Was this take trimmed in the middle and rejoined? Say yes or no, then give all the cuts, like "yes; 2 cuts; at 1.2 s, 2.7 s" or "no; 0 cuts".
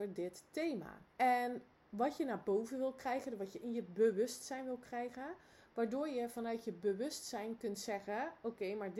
yes; 1 cut; at 1.1 s